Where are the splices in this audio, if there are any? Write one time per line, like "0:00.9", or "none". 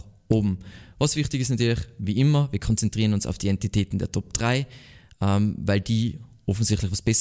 none